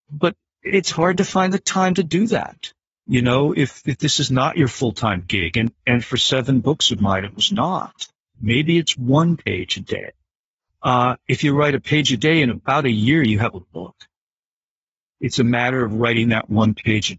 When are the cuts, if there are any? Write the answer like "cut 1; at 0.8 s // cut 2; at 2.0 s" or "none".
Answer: cut 1; at 8.3 s // cut 2; at 10.7 s